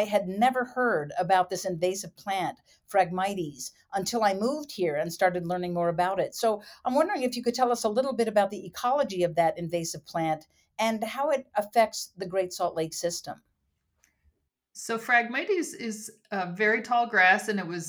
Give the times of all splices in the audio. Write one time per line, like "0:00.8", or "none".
none